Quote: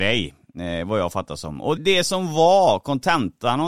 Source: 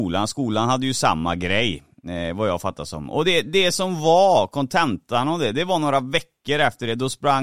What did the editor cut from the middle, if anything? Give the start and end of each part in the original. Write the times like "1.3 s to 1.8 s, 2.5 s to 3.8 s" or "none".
3.2 s to 3.4 s